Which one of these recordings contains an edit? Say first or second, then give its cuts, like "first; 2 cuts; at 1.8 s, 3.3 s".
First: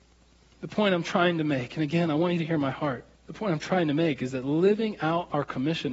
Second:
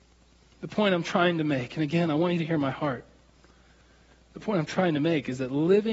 first; 1 cut; at 3.1 s